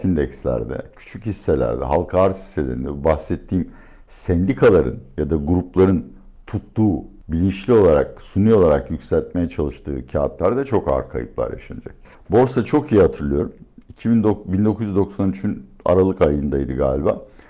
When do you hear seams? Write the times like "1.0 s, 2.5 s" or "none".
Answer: 12.1 s